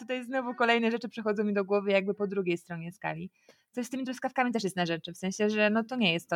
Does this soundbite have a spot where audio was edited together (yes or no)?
no